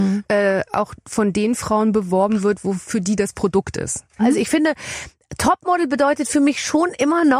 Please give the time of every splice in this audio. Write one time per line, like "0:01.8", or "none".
0:04.2